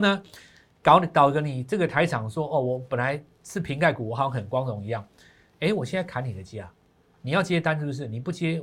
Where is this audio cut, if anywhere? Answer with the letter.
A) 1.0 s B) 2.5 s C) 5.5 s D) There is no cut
D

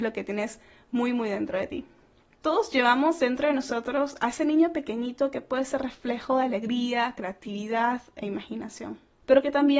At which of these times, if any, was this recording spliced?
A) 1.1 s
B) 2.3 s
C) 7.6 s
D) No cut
D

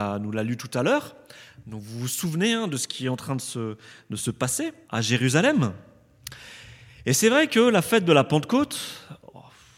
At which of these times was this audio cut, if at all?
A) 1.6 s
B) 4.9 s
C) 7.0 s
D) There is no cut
B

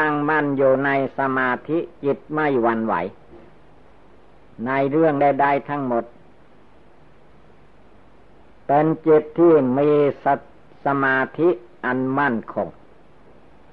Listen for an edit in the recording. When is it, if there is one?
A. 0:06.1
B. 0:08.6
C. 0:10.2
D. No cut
D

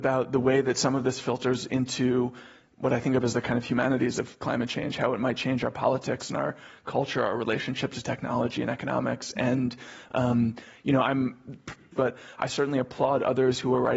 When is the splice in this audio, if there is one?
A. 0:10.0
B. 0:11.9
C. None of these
B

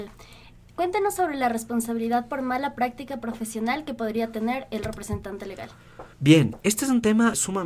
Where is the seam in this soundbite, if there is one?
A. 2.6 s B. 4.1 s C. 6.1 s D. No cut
C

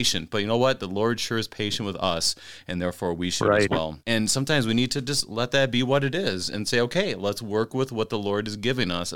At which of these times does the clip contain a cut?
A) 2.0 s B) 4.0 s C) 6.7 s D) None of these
B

